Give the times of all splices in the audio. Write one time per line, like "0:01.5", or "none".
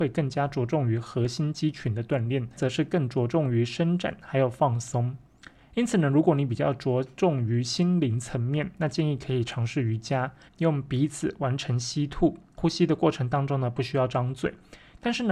0:02.6
0:10.5